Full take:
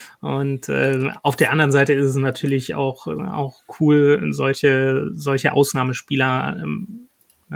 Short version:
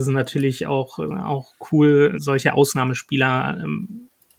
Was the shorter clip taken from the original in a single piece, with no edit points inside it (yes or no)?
no